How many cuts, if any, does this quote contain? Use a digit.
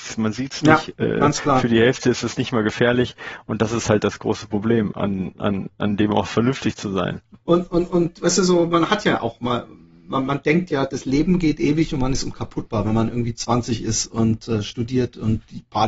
1